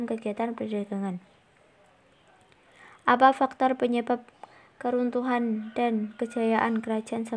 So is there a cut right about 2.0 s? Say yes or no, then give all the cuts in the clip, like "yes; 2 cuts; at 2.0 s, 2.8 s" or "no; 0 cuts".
no; 0 cuts